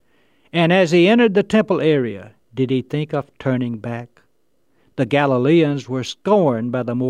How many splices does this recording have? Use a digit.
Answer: 1